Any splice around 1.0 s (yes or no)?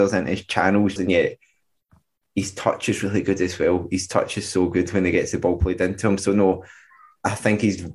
yes